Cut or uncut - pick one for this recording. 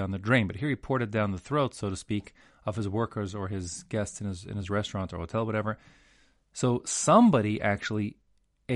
uncut